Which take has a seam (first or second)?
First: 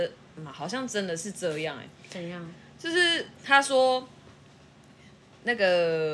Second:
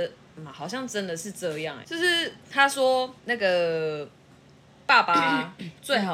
second